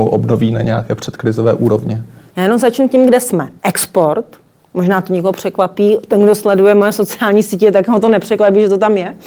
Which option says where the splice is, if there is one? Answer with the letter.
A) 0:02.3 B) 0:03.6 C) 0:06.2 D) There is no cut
B